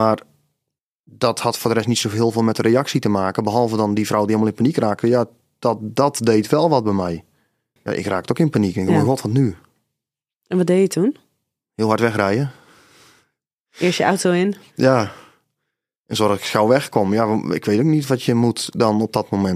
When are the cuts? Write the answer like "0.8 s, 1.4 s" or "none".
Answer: 7.8 s